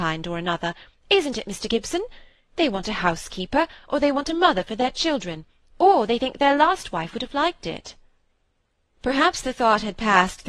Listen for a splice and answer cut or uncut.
uncut